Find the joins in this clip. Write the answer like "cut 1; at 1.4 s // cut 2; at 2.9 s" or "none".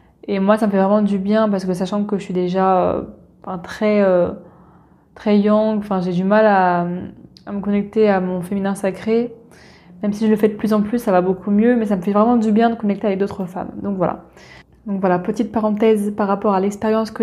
none

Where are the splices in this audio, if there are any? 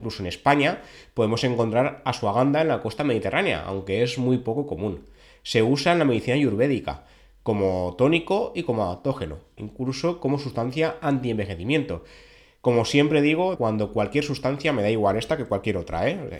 cut 1; at 9.6 s // cut 2; at 13.6 s

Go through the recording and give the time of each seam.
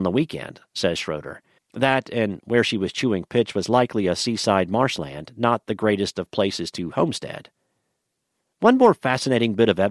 cut 1; at 1.6 s

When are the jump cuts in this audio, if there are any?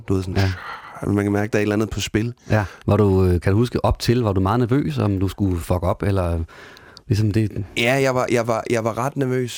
cut 1; at 2.8 s

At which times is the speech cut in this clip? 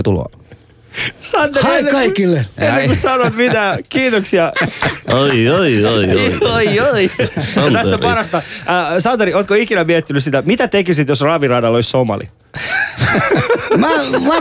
cut 1; at 4.6 s

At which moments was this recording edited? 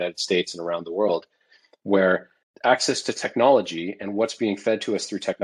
none

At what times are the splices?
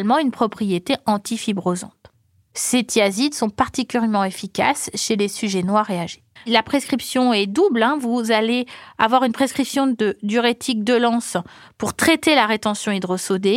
cut 1; at 6.4 s

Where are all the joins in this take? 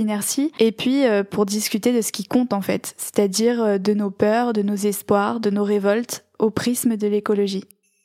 none

